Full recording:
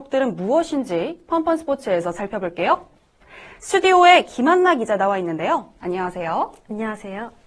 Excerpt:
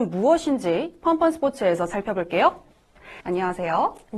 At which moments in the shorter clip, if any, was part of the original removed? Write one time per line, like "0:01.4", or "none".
0:03.2